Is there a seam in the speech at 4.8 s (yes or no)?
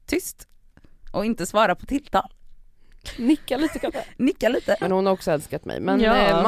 yes